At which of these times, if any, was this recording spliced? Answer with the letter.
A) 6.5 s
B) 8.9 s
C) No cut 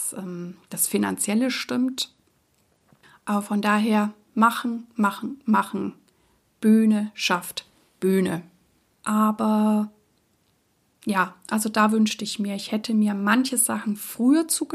B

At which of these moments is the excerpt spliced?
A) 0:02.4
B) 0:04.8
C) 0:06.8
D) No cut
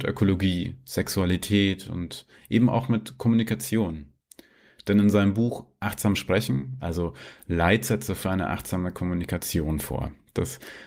C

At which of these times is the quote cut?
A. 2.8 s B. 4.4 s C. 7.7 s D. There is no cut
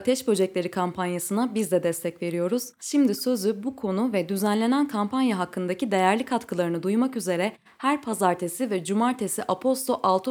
D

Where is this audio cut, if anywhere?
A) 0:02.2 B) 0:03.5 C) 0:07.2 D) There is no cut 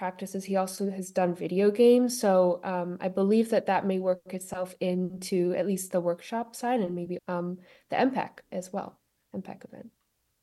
C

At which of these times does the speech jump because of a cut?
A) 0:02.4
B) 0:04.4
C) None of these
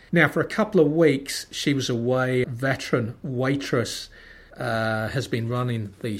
A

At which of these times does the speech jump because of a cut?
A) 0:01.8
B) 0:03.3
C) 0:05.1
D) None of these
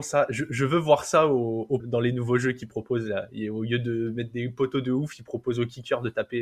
A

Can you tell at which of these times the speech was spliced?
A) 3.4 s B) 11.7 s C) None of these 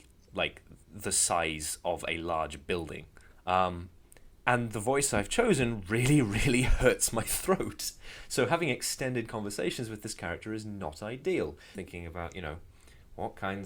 B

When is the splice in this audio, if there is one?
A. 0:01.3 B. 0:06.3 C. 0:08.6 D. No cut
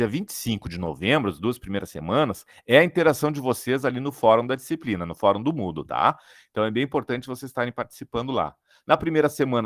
D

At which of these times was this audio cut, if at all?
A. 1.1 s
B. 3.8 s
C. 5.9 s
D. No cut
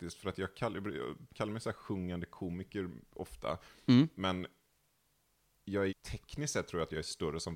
C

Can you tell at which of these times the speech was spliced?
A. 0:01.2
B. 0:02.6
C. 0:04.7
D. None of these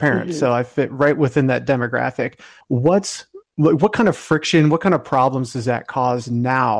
B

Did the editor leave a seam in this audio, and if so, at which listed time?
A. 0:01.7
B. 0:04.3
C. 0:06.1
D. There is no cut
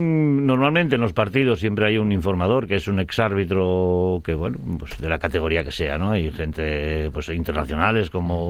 D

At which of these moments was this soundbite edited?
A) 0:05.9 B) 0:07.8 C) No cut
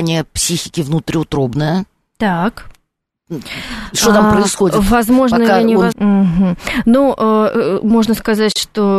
A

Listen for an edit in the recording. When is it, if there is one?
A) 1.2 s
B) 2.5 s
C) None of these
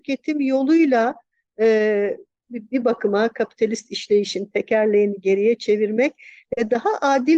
B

